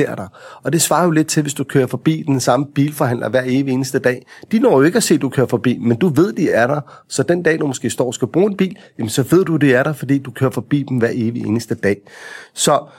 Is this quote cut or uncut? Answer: uncut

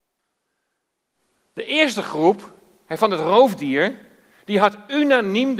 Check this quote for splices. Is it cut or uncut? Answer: uncut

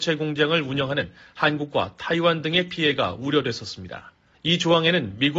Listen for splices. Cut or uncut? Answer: cut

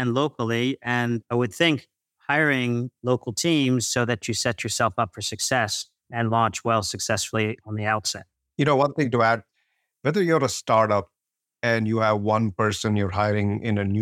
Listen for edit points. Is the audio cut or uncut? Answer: uncut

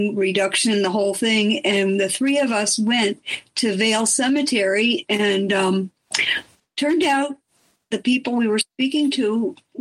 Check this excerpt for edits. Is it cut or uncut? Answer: uncut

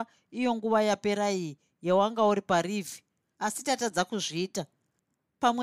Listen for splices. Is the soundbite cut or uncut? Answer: uncut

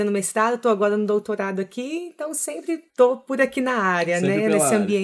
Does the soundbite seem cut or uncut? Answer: cut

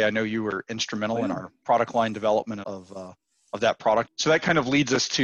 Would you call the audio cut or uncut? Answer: cut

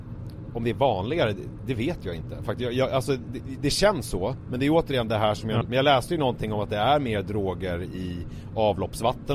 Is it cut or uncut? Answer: cut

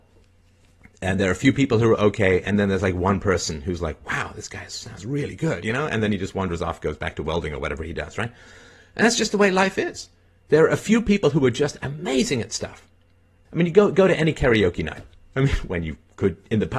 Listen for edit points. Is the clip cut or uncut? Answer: cut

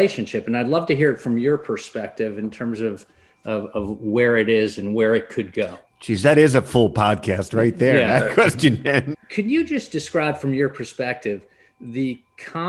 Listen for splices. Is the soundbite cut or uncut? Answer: cut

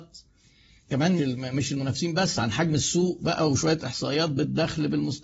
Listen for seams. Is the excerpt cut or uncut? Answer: cut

